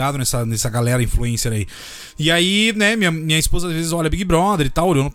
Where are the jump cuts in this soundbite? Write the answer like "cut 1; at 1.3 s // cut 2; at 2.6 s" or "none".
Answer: none